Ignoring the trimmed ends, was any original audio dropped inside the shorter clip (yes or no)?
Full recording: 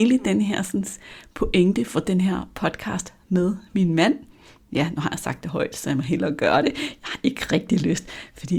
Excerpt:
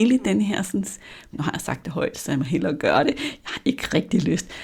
yes